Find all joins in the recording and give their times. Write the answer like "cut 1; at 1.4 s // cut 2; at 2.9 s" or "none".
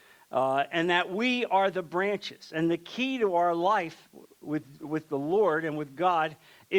none